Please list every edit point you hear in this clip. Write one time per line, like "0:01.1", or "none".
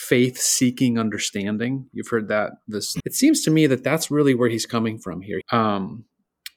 0:03.0
0:05.4